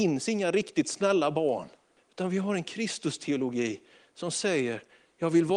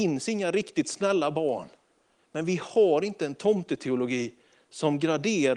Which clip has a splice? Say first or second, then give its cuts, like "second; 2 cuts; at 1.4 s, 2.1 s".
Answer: first; 1 cut; at 2.0 s